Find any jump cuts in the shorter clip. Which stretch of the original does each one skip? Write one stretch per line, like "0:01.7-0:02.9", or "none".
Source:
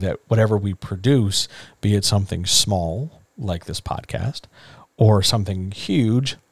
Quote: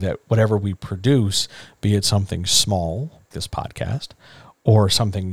0:03.3-0:03.6